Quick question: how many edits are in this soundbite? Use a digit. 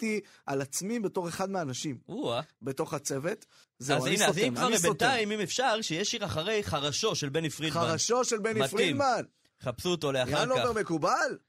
1